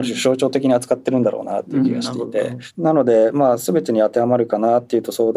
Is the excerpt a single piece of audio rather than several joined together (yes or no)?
yes